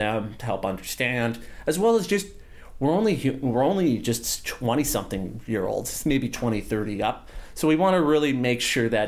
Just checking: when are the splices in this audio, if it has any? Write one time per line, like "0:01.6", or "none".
none